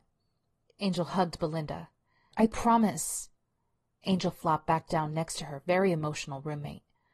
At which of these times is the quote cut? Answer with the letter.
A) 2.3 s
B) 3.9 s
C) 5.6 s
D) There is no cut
A